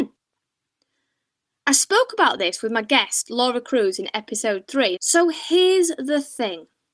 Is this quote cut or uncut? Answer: cut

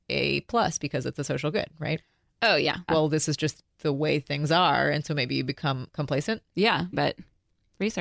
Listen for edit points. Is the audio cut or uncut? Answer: cut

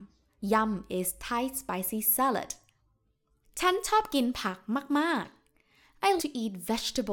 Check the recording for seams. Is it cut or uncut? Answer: cut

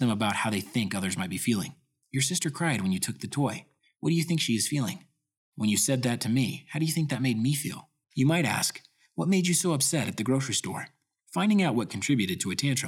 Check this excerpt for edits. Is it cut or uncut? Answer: cut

